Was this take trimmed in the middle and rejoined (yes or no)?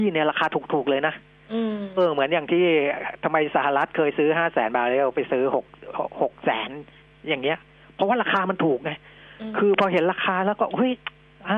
yes